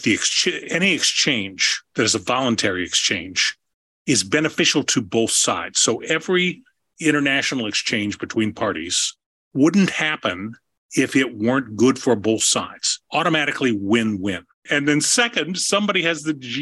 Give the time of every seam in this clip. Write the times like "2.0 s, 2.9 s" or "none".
14.7 s